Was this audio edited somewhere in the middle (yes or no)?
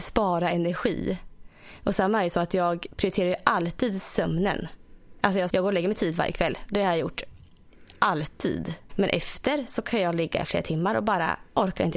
yes